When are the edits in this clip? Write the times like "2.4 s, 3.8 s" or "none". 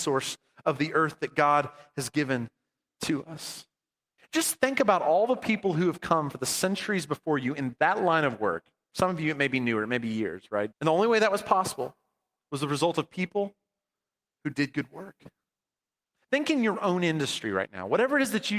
4.2 s, 10.7 s